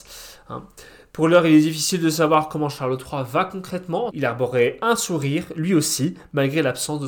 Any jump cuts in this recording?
yes; 1 cut; at 4.1 s

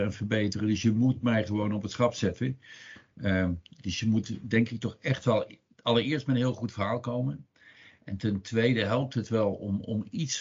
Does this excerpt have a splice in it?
no; 0 cuts

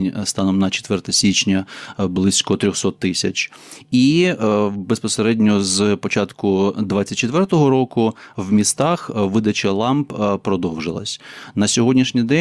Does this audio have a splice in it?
no; 0 cuts

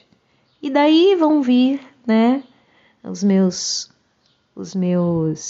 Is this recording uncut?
yes; 0 cuts

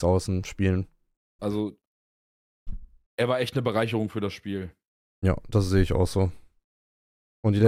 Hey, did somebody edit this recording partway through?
yes; 1 cut; at 1.4 s

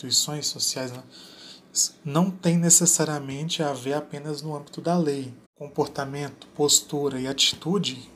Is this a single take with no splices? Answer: no; 1 cut; at 5.4 s

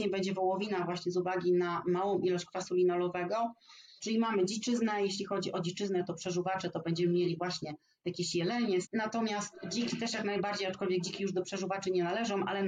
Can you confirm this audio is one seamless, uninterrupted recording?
no; 2 cuts; at 4.0 s, 8.8 s

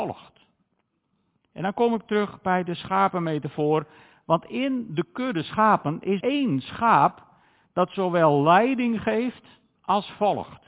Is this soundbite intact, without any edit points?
no; 1 cut; at 6.2 s

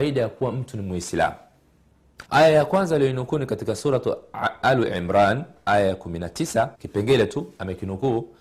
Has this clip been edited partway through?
yes; 3 cuts; at 2.2 s, 4.6 s, 6.7 s

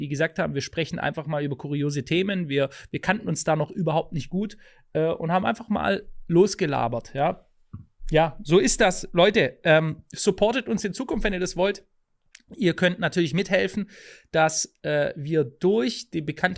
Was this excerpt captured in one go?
yes; 0 cuts

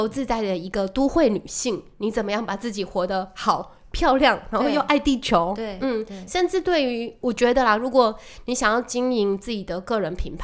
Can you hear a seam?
no; 0 cuts

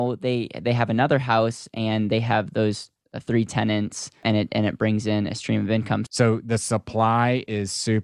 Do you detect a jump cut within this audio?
yes; 1 cut; at 6.1 s

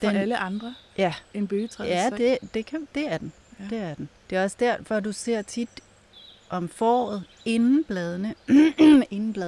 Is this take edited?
yes; 1 cut; at 4.2 s

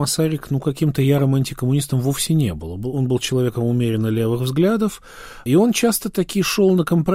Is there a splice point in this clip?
no; 0 cuts

